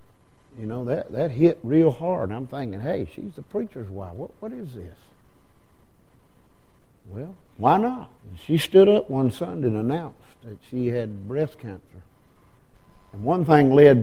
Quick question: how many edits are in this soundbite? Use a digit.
1